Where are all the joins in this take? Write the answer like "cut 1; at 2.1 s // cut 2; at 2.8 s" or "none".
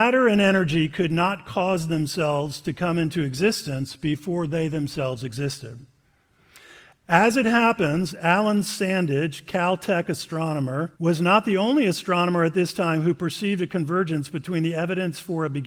cut 1; at 11.0 s